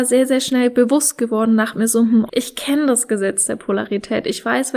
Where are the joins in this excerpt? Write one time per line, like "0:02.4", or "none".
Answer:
0:02.3